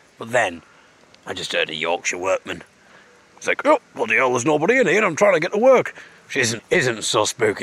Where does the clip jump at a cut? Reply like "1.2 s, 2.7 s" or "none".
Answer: 6.6 s